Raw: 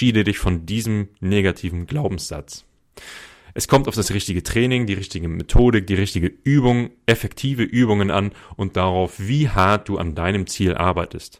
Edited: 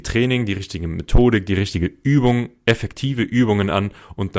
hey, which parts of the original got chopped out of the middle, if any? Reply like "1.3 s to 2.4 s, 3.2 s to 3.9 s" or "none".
none